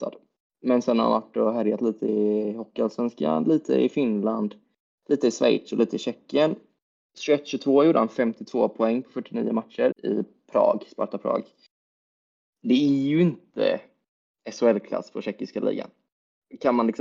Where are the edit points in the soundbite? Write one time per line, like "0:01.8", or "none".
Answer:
0:09.9